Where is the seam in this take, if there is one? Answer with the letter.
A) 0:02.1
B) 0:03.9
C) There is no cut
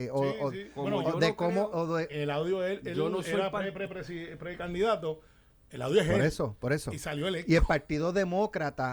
A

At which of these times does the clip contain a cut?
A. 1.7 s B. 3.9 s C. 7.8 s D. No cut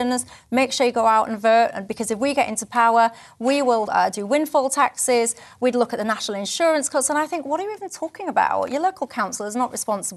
B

